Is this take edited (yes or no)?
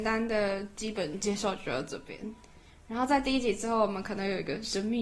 no